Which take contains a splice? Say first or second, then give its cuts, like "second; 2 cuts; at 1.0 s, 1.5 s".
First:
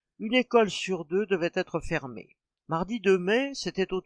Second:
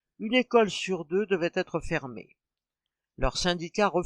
first; 1 cut; at 2.6 s